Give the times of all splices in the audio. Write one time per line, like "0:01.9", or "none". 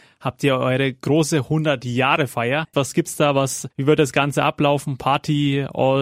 0:02.7